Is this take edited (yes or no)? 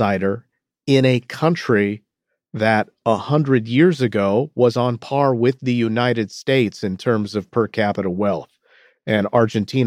no